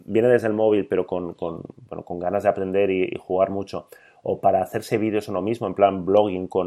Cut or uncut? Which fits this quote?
uncut